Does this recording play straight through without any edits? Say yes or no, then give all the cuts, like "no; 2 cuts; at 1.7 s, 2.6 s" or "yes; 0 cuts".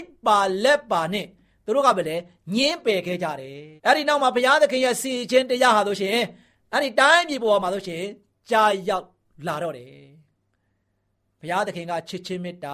no; 1 cut; at 3.8 s